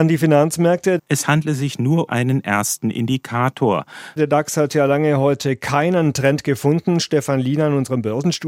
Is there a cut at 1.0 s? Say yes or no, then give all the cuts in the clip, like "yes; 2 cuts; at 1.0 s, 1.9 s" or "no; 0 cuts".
yes; 3 cuts; at 1.0 s, 2.1 s, 4.2 s